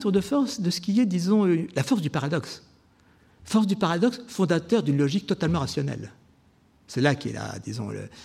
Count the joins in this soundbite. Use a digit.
0